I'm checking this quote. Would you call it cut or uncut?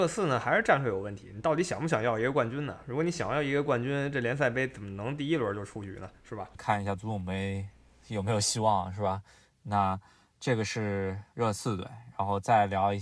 uncut